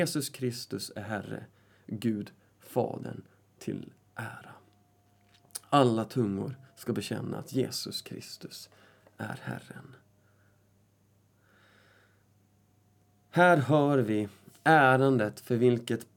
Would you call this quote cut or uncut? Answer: uncut